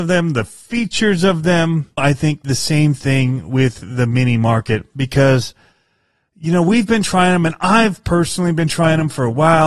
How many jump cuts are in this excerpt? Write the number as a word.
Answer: one